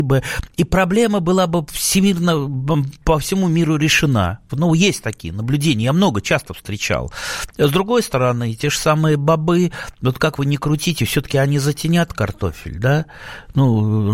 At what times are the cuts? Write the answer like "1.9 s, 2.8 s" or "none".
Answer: 4.5 s

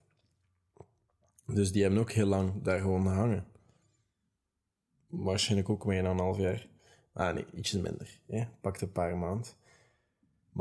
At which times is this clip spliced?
none

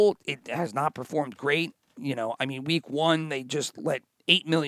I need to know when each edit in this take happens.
none

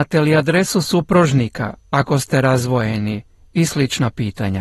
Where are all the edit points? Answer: none

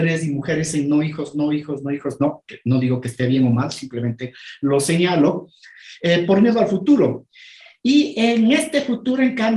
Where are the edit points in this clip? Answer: none

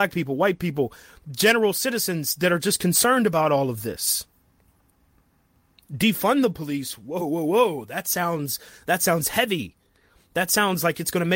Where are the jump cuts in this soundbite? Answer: 7.2 s

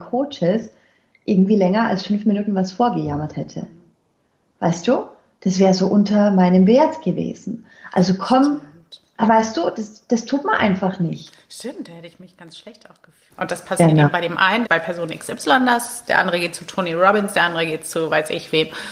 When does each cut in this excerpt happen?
13.3 s, 14.6 s

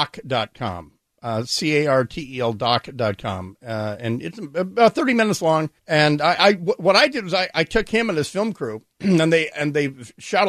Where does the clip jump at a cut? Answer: 5.8 s

